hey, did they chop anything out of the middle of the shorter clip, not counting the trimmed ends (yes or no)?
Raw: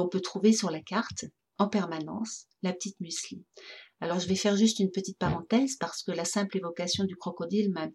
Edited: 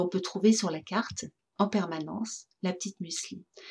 no